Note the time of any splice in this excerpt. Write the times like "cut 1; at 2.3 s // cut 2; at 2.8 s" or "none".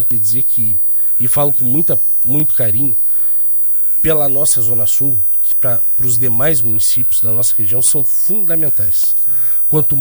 cut 1; at 2.2 s // cut 2; at 5.5 s